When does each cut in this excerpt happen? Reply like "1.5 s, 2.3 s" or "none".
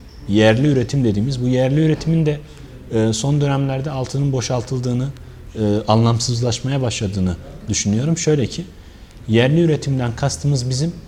none